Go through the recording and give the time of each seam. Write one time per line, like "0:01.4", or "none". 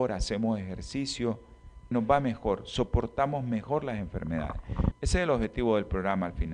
0:01.9
0:04.9

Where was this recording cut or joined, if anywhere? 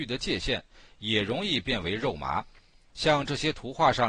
0:02.9

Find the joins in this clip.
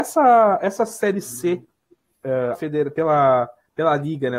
0:02.5

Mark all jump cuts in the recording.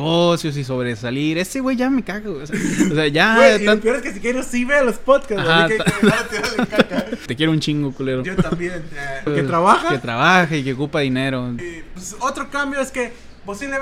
0:07.3
0:09.3
0:11.6

